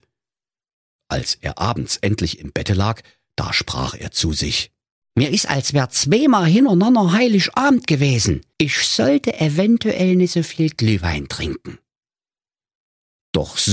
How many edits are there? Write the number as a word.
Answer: two